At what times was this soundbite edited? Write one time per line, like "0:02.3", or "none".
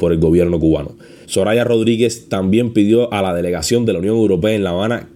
0:01.2

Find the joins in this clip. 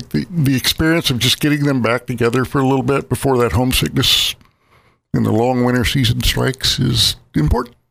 none

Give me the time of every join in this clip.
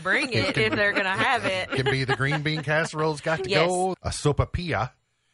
0:03.9

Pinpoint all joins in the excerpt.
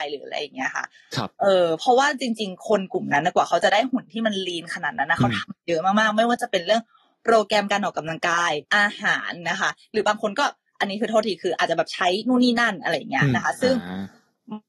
0:08.7

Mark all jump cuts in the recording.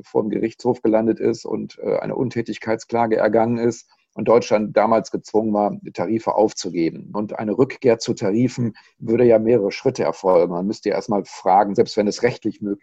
0:07.1

